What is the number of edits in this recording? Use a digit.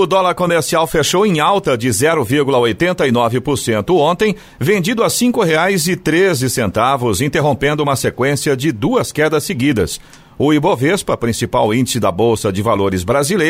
0